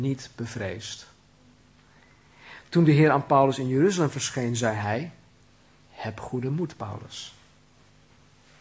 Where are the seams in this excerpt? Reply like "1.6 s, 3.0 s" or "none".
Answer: none

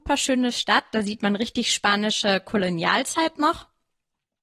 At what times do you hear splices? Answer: none

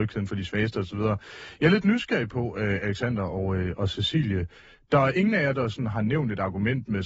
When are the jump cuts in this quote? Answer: none

